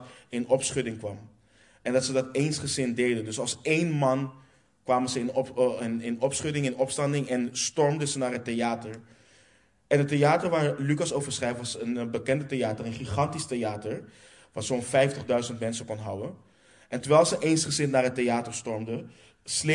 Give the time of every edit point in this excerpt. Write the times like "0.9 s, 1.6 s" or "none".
none

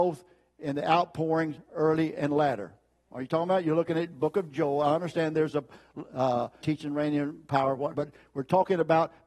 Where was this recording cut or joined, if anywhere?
6.6 s, 7.9 s

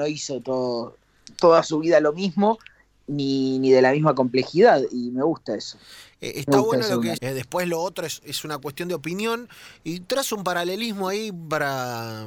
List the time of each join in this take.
7.1 s

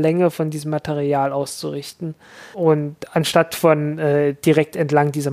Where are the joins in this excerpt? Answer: 2.5 s

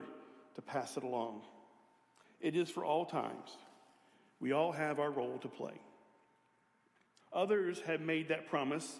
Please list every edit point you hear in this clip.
2.2 s, 7.2 s

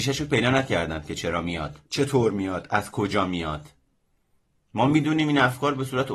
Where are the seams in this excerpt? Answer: 1.9 s

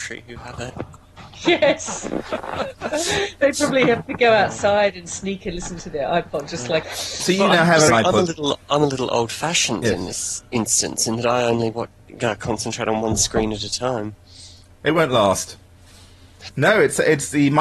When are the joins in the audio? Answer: 6.8 s, 7.9 s, 16.5 s

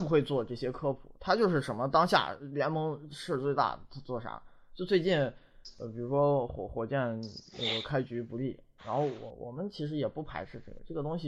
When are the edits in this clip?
8.8 s

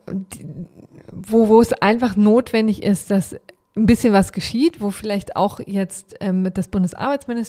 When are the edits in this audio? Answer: none

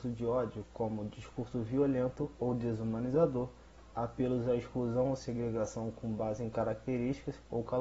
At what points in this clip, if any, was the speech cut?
3.9 s

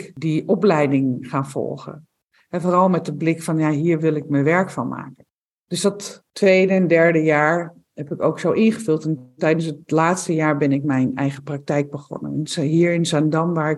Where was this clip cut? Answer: none

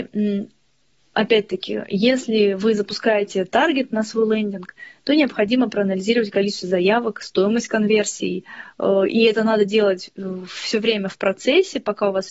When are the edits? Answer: none

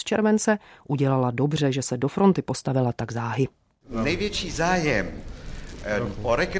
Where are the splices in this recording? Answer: none

